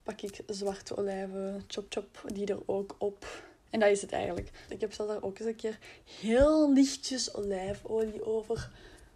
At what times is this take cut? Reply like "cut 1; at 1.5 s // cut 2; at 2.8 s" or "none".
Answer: cut 1; at 1.9 s // cut 2; at 3.6 s // cut 3; at 4.7 s